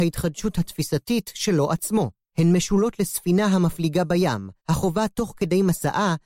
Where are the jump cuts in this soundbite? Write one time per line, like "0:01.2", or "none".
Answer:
0:02.3
0:04.6